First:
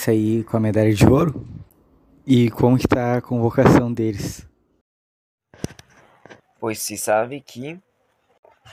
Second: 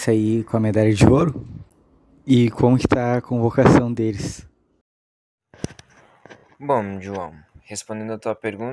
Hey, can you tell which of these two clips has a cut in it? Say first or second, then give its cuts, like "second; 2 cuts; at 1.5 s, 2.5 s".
first; 1 cut; at 6.4 s